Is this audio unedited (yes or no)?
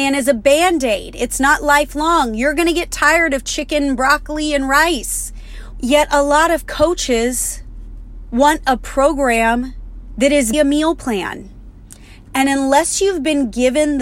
no